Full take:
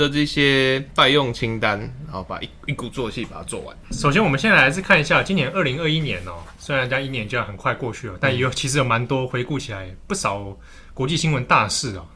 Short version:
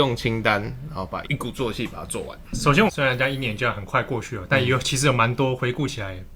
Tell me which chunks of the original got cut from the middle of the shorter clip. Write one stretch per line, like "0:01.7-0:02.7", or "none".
0:02.4-0:02.6
0:04.2-0:06.6